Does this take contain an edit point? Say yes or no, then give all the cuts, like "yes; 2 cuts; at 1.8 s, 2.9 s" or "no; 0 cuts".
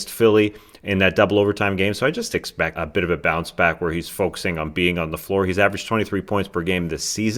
yes; 1 cut; at 2.8 s